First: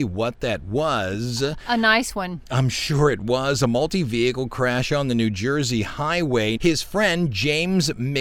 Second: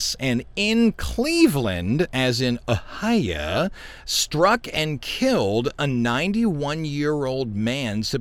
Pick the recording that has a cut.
first; 1 cut; at 6.6 s

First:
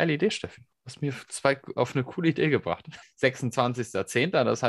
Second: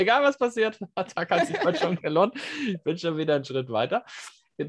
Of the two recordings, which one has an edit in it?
first; 1 cut; at 3.0 s

